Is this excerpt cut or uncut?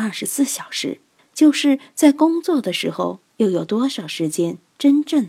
cut